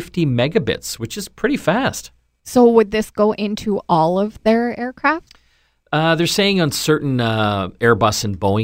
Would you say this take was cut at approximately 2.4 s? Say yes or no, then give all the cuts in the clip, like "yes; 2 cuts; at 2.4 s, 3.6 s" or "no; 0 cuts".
yes; 1 cut; at 2.4 s